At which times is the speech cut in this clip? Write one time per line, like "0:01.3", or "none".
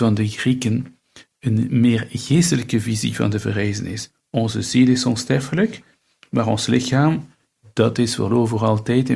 none